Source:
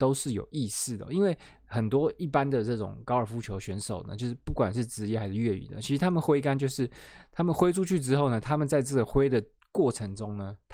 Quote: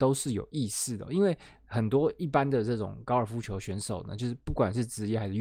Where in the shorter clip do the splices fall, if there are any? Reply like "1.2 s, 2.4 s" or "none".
none